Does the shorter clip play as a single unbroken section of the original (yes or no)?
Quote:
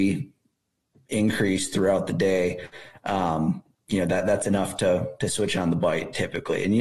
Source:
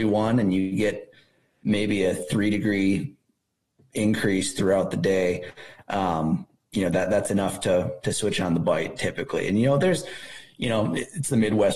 yes